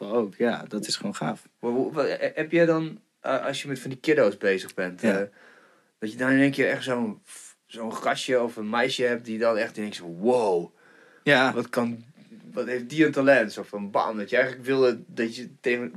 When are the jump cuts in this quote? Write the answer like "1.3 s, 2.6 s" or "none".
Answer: none